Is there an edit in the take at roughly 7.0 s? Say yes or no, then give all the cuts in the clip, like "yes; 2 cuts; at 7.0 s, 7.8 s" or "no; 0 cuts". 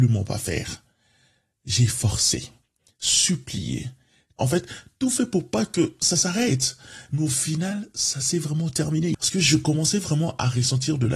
no; 2 cuts; at 4.4 s, 9.2 s